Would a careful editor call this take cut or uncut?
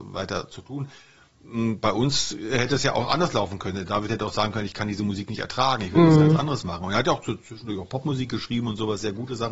uncut